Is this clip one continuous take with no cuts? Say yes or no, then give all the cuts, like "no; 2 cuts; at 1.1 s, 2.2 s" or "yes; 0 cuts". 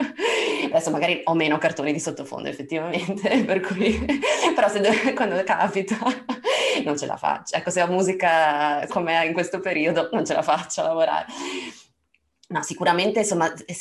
no; 1 cut; at 8.9 s